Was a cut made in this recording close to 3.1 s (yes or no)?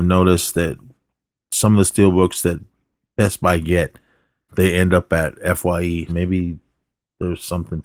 no